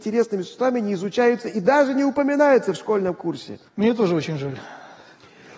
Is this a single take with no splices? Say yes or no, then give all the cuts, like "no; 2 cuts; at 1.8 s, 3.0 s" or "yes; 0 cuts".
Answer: no; 1 cut; at 3.7 s